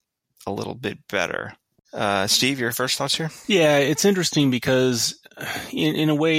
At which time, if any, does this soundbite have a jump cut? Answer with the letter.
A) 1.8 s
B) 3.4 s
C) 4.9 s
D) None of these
A